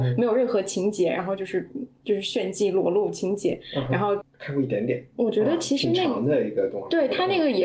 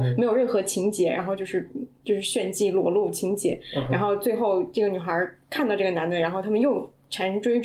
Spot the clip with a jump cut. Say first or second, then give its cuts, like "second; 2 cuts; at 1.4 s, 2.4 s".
first; 1 cut; at 4.2 s